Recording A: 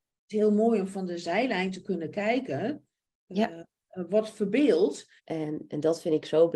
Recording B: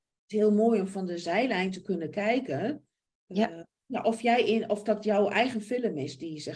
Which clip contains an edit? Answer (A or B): A